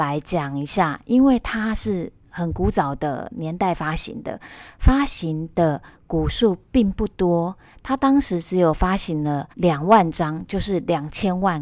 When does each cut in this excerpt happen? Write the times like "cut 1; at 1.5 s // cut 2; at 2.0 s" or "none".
cut 1; at 9.5 s